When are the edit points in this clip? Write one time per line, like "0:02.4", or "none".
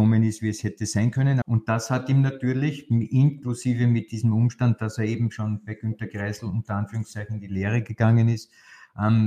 0:01.4